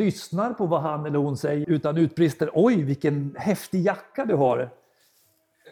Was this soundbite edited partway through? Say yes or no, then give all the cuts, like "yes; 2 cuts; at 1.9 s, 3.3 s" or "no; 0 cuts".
yes; 1 cut; at 1.6 s